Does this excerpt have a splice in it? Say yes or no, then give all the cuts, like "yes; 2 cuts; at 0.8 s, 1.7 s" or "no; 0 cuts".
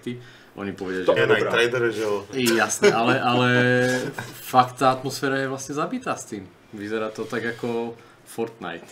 yes; 1 cut; at 1.2 s